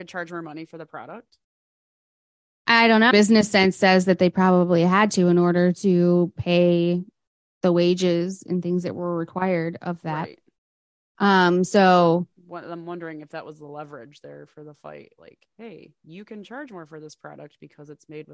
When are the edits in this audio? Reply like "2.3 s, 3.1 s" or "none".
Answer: 3.1 s

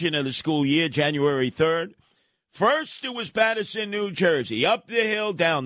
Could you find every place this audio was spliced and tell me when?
none

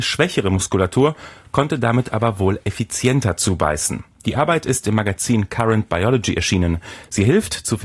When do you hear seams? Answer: none

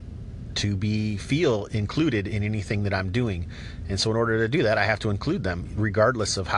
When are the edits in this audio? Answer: none

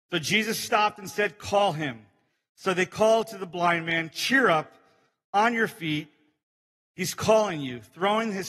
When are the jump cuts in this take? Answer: none

